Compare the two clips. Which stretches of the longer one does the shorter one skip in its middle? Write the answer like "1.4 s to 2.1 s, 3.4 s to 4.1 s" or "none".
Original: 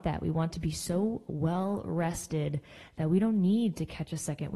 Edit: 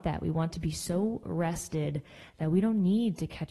1.2 s to 1.8 s